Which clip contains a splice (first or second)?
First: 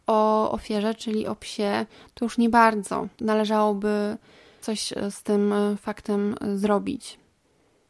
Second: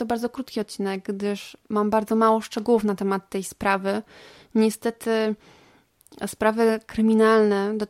first